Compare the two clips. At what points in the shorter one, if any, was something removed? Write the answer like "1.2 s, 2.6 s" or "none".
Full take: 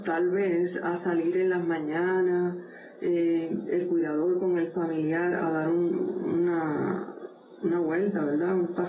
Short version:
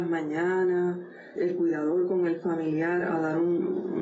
1.4 s

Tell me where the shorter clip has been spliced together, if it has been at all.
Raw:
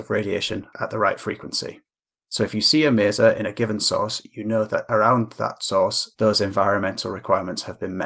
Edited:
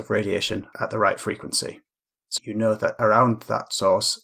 2.4 s

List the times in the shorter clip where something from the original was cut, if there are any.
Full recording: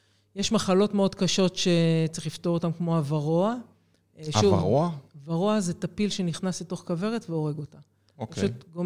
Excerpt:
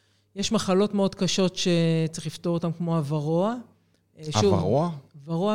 none

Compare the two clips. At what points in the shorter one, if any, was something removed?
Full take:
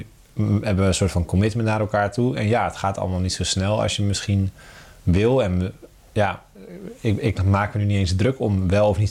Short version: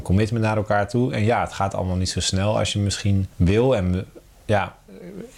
3.3 s

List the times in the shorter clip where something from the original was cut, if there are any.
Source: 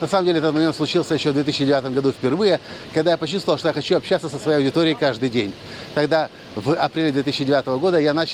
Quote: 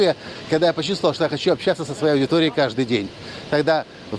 none

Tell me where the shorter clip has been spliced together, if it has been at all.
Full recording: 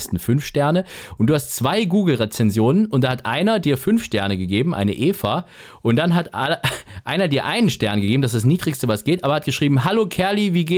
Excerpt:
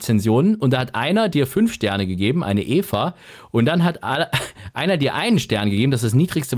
none

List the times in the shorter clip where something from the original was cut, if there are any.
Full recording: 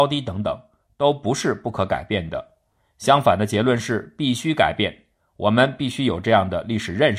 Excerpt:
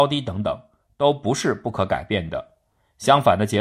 none

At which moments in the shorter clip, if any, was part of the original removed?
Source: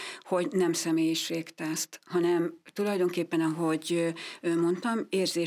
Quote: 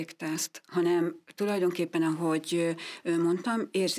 none

